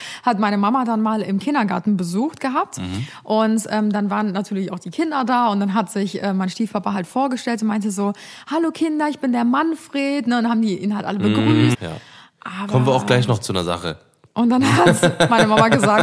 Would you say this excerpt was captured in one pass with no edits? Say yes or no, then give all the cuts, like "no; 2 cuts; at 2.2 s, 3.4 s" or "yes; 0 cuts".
no; 2 cuts; at 11.7 s, 14.3 s